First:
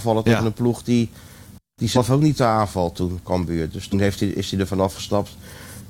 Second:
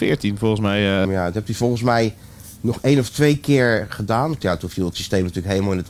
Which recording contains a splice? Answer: second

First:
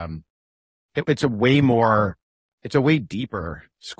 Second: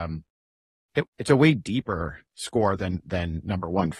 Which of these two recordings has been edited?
second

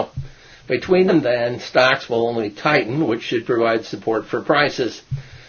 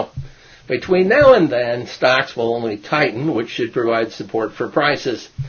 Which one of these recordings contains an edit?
first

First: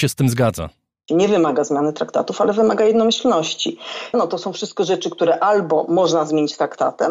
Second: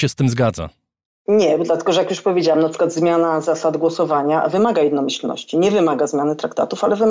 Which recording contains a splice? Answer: first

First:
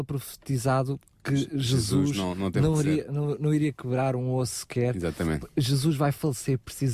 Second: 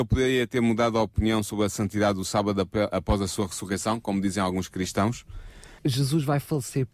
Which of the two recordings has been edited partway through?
second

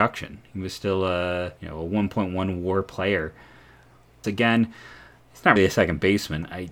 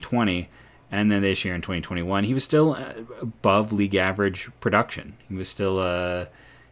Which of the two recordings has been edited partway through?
first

